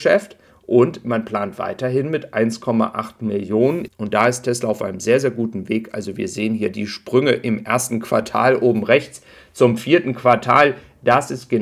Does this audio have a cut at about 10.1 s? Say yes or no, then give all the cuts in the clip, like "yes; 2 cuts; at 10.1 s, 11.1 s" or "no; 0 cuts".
no; 1 cut; at 3.9 s